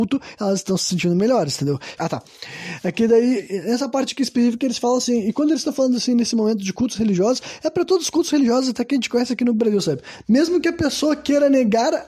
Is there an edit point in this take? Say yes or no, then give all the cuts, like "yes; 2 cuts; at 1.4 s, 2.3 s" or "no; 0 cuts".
yes; 2 cuts; at 2.0 s, 10.2 s